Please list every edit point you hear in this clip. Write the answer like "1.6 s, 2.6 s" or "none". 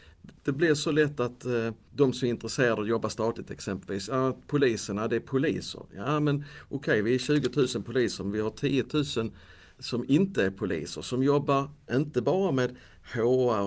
none